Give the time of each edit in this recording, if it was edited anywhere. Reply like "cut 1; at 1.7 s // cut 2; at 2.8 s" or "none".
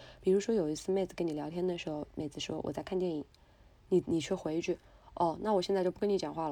none